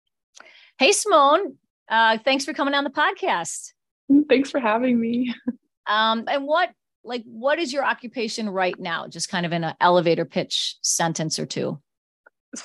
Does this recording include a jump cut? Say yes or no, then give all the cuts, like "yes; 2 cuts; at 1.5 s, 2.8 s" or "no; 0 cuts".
yes; 1 cut; at 6.3 s